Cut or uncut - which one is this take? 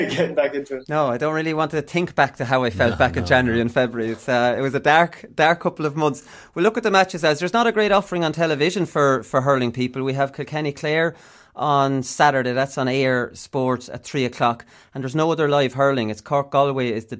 uncut